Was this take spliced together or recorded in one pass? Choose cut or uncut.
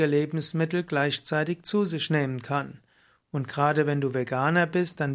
uncut